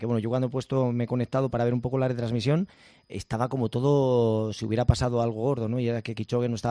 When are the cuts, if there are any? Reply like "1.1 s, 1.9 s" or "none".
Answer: none